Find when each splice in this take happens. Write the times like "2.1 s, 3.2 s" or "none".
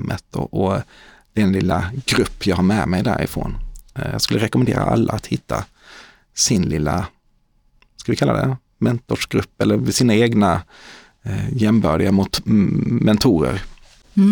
none